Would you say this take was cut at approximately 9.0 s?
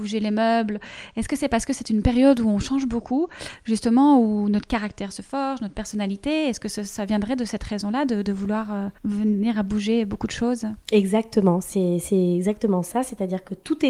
yes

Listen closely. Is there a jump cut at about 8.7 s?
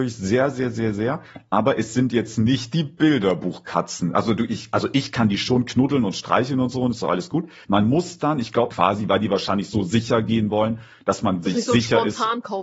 yes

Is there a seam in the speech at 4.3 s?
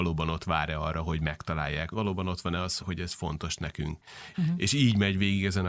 yes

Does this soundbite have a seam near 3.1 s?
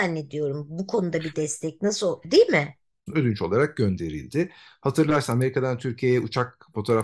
yes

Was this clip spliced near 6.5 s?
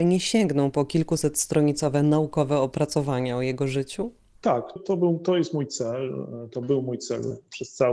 no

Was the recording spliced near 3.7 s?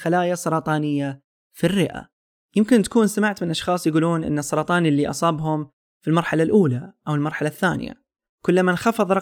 no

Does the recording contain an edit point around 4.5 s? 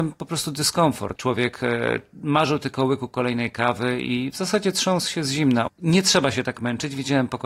no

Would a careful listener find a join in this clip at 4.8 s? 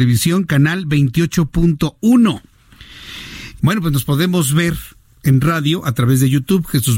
no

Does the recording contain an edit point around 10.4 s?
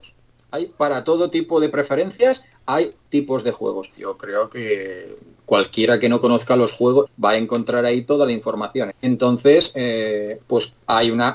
no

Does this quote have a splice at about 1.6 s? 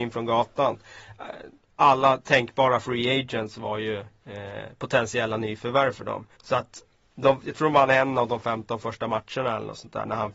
no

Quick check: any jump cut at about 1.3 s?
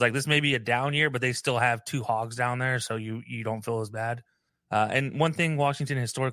no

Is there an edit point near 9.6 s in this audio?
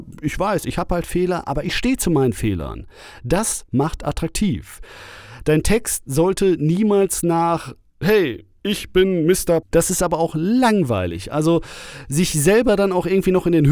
yes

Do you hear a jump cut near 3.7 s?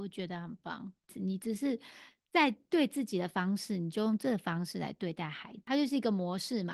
no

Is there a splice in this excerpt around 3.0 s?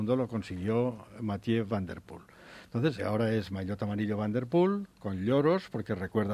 yes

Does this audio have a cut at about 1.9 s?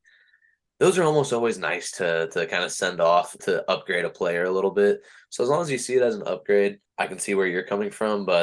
no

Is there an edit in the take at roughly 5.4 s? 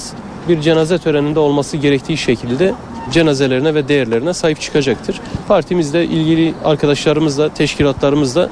yes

